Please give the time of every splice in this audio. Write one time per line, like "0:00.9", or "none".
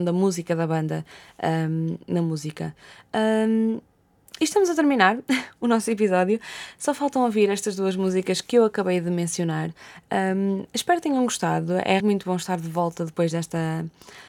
0:12.0